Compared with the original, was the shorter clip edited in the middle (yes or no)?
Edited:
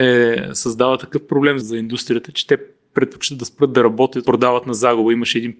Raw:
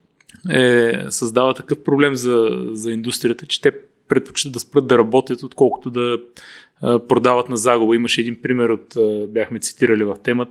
yes